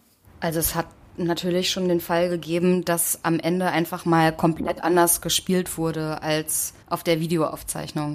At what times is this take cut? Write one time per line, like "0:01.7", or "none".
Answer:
0:06.8